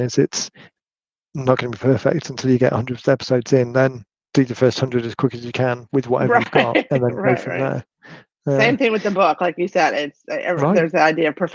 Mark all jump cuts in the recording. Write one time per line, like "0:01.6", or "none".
none